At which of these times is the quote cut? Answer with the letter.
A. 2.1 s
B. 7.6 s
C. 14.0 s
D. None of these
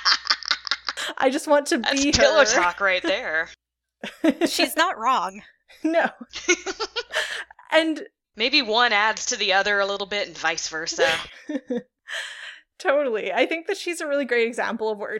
D